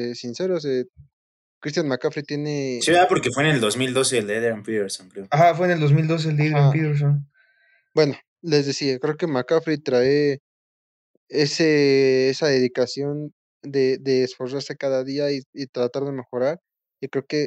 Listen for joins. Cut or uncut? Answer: uncut